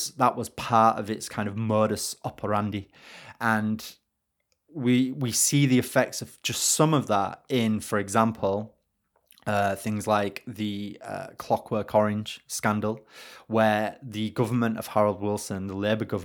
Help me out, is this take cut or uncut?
uncut